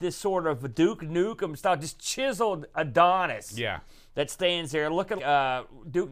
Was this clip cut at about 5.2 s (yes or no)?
yes